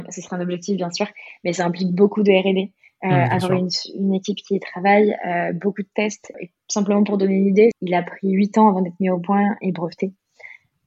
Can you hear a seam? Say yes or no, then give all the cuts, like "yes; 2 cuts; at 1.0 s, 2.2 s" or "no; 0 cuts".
yes; 2 cuts; at 6.3 s, 7.7 s